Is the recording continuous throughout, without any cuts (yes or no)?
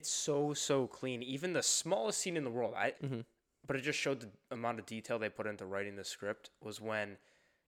no